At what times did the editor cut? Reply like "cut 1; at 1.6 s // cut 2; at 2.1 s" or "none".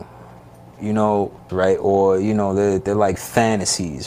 cut 1; at 1.5 s